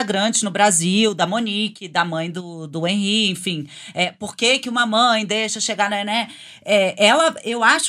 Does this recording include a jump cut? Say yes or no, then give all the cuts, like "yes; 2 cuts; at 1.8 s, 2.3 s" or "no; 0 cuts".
no; 0 cuts